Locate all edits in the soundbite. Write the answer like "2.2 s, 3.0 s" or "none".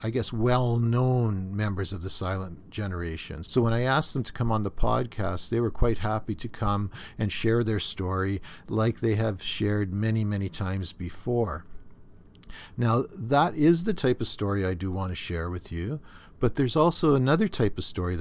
3.4 s